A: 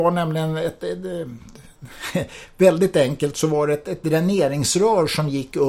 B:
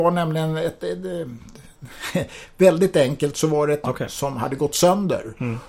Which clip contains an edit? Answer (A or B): B